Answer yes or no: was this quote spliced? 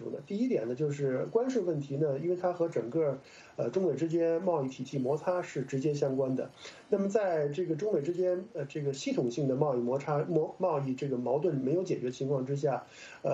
no